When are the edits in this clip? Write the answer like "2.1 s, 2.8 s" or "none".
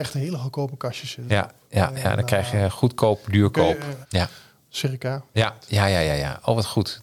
4.0 s, 5.3 s